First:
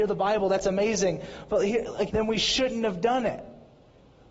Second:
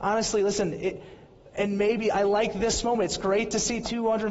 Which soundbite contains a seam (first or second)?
first